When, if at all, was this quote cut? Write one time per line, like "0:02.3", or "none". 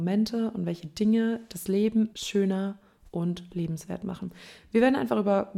0:02.1